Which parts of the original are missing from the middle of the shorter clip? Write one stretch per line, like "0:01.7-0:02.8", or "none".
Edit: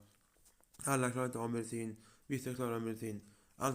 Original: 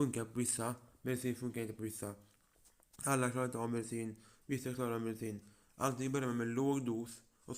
none

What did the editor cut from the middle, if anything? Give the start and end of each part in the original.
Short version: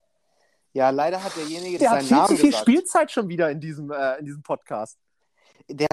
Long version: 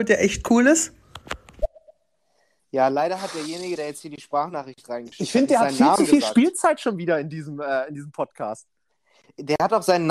0:03.8-0:05.5

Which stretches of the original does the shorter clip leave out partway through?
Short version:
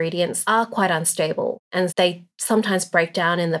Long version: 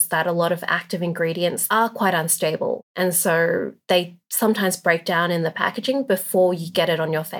0:03.1-0:03.8

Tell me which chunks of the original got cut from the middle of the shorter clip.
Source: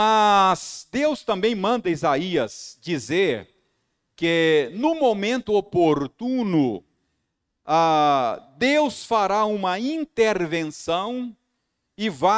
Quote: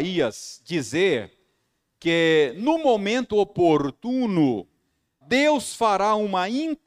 0:07.4-0:08.5

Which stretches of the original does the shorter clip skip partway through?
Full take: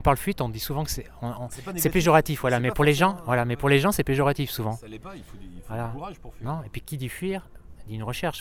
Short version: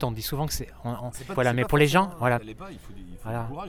0:01.7-0:02.4
0:03.4-0:04.8

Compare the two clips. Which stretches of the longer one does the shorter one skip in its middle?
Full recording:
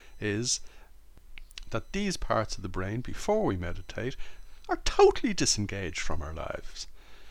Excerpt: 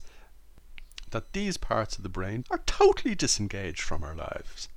0:03.0-0:04.6

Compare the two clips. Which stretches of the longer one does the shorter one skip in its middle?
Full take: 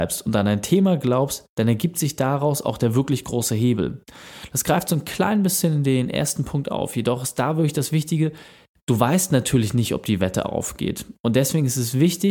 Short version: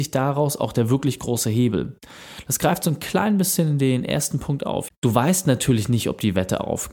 0:06.9-0:08.7

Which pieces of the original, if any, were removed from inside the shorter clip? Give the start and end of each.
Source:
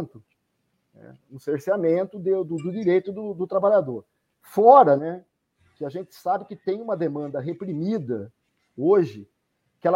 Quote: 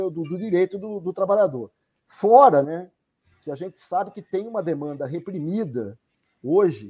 none

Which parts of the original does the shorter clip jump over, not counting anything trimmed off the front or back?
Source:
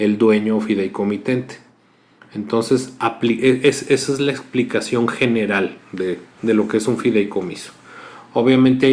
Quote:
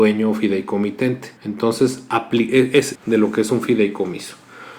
0:01.6-0:02.3
0:03.9-0:06.3

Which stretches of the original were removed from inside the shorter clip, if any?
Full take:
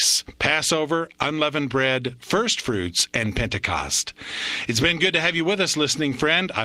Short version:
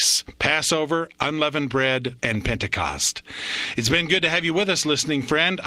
0:02.2-0:03.1

